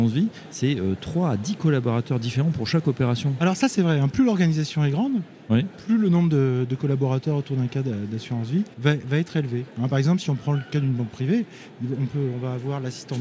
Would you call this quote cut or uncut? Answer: cut